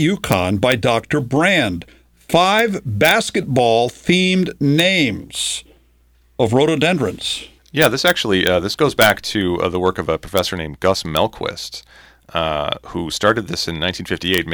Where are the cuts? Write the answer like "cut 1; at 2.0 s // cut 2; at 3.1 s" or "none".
cut 1; at 7.6 s